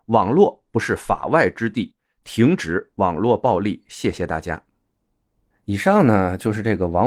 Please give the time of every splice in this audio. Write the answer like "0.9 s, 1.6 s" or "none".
none